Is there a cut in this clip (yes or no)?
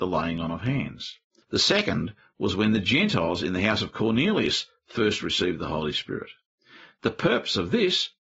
yes